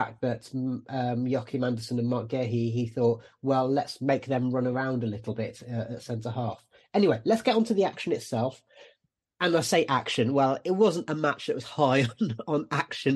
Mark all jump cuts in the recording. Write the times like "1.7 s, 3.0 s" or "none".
none

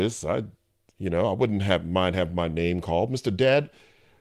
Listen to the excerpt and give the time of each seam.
none

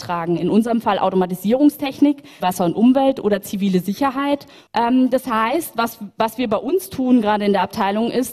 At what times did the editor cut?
2.4 s, 4.7 s

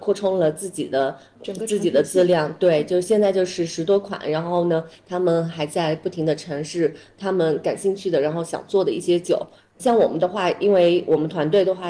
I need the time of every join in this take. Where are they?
9.6 s

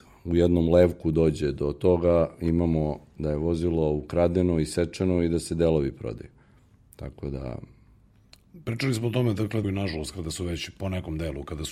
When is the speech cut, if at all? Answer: 9.6 s

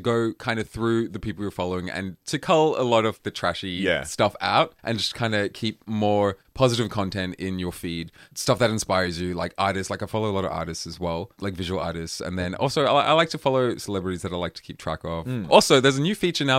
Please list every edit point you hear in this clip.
none

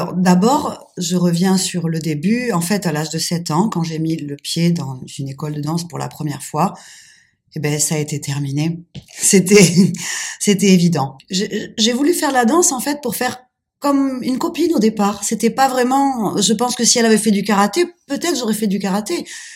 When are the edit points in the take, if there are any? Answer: 11.2 s

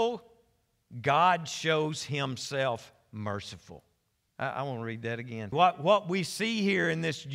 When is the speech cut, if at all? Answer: 4.3 s, 5.5 s

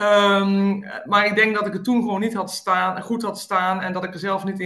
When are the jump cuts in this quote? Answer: none

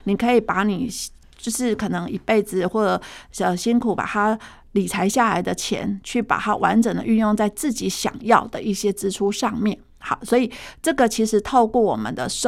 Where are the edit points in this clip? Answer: none

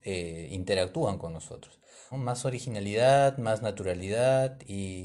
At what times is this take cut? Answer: 2.1 s

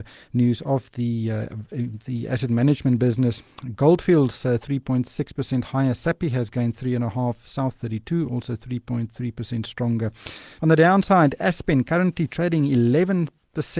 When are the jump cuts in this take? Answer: 10.6 s

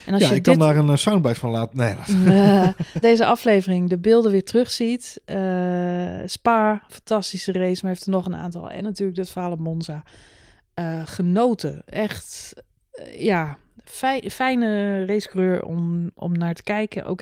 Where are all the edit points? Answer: 3.0 s

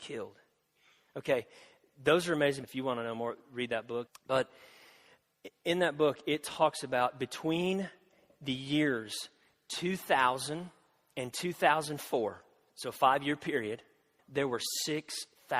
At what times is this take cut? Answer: 2.6 s, 4.1 s, 14.2 s

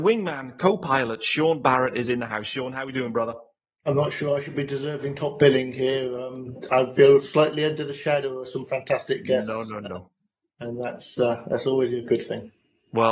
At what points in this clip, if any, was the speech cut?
none

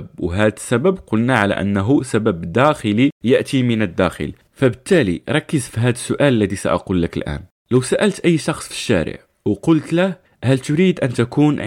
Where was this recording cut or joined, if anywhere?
none

